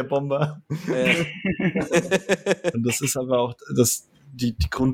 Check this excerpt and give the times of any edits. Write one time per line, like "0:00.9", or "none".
0:02.7